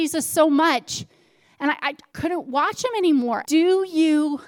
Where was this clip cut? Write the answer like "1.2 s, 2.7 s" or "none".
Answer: 2.1 s, 3.4 s